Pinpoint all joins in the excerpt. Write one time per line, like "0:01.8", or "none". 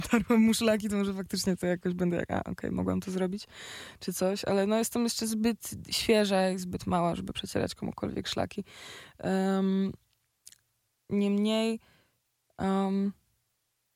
none